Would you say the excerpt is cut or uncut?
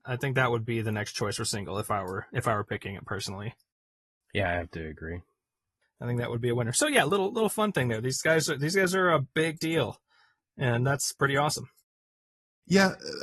cut